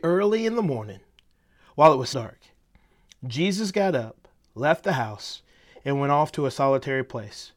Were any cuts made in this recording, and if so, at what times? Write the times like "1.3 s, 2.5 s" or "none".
2.1 s